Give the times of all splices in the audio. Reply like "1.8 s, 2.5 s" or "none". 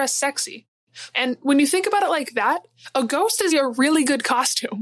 1.1 s, 3.5 s